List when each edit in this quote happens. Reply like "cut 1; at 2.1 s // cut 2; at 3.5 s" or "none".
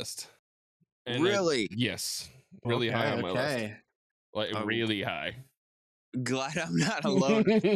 cut 1; at 2.6 s